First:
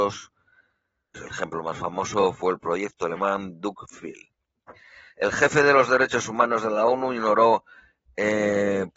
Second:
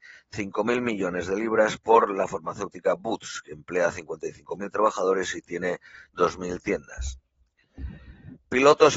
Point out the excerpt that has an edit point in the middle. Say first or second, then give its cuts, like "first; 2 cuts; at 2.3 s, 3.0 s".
first; 1 cut; at 1.1 s